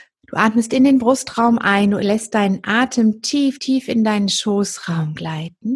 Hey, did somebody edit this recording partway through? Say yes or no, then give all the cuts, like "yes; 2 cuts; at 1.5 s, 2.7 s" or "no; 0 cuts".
yes; 1 cut; at 3.6 s